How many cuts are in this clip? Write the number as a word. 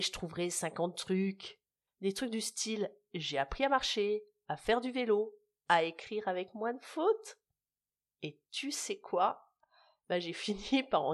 one